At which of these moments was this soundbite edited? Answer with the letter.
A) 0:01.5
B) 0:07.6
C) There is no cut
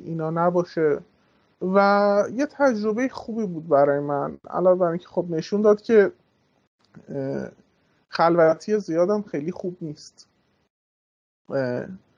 C